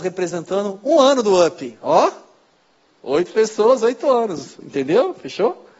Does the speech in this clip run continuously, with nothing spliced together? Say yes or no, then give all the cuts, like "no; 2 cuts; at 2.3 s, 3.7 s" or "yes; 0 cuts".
yes; 0 cuts